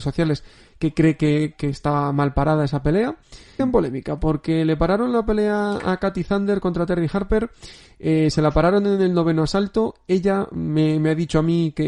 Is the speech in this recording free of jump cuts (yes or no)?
no